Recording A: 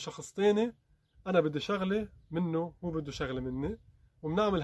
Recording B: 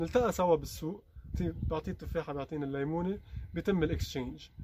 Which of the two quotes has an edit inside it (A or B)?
B